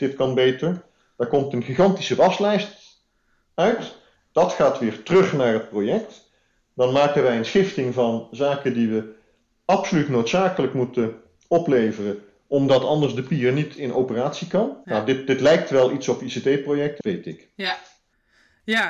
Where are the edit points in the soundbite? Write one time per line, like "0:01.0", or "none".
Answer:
0:14.8
0:17.0